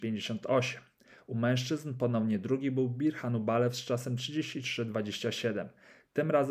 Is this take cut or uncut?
uncut